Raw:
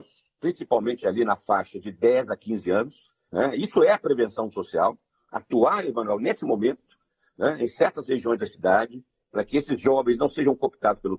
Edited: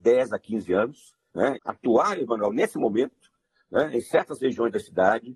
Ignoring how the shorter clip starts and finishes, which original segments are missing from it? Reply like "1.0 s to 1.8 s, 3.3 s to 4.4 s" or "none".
3.5 s to 5.2 s